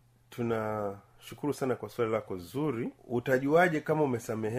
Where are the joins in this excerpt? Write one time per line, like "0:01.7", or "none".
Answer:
0:03.0